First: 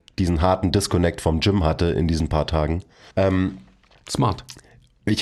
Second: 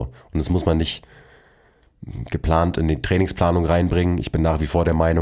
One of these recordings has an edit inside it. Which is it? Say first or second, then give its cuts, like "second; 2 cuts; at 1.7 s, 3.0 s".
first; 1 cut; at 3.1 s